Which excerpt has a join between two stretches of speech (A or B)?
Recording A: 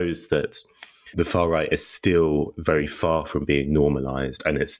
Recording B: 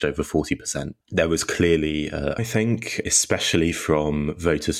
B